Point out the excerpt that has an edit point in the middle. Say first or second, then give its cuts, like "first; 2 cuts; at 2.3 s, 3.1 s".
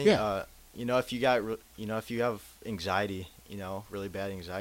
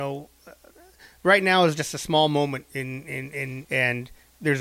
second; 1 cut; at 3.6 s